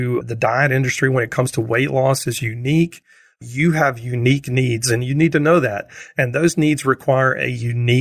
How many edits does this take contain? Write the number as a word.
zero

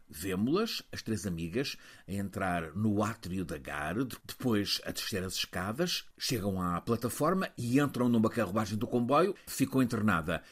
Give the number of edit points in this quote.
one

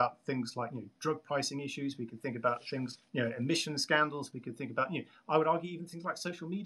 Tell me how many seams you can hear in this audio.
one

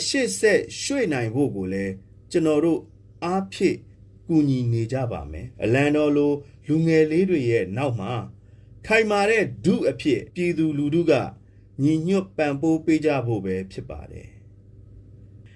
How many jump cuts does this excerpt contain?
two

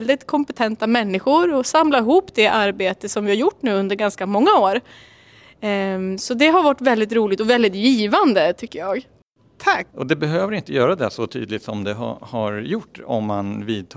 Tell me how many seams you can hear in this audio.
one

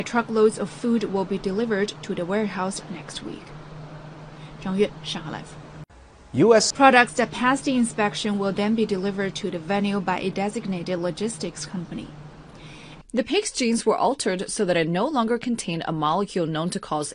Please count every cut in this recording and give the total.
two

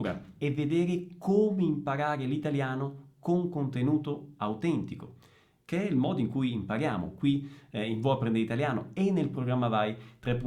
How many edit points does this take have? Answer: zero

